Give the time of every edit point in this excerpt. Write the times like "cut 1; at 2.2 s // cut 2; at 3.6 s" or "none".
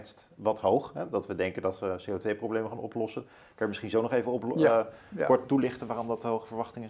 none